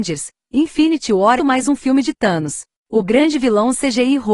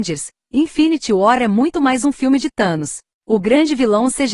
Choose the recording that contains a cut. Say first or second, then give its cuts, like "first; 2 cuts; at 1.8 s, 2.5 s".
first; 1 cut; at 1.4 s